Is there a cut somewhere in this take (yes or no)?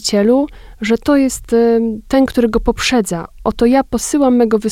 no